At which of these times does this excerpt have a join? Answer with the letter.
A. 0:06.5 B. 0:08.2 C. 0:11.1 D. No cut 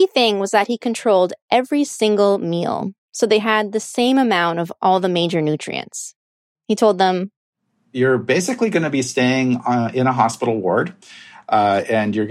A